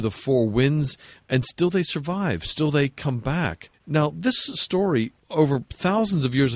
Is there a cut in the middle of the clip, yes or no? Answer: yes